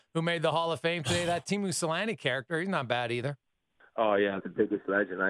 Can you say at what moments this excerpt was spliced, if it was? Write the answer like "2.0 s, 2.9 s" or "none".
4.4 s